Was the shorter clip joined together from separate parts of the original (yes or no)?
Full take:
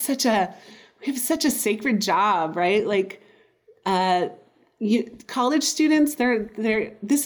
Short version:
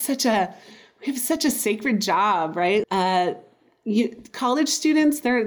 yes